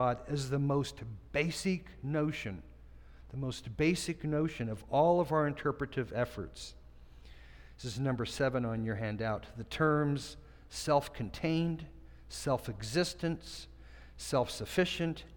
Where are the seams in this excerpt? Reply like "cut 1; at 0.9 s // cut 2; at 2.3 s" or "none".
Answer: none